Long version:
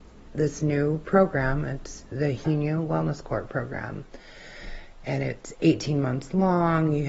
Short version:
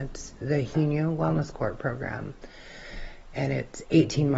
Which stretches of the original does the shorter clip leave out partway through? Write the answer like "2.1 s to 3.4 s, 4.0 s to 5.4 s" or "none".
none